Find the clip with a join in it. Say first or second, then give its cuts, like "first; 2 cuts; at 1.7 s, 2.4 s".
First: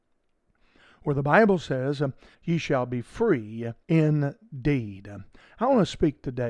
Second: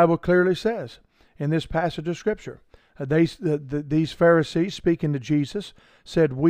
first; 2 cuts; at 2.3 s, 3.8 s